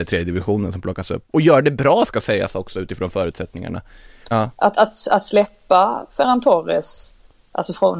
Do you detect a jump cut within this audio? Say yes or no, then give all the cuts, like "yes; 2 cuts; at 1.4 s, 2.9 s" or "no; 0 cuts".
yes; 1 cut; at 4.3 s